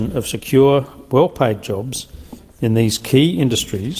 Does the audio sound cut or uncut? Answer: uncut